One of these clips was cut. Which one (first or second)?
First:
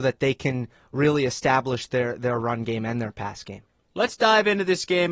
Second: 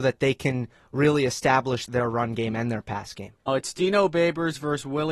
second